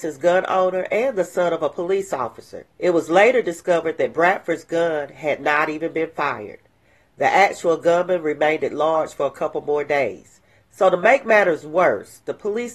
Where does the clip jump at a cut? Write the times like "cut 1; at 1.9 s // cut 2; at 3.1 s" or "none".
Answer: cut 1; at 2.7 s